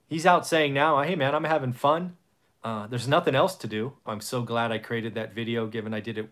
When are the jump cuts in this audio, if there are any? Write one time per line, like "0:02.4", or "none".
0:04.1